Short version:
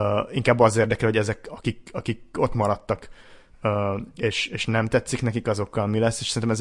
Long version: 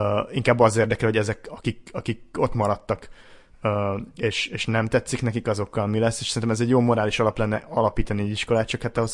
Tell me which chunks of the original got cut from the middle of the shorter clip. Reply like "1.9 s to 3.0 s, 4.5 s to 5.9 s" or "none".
none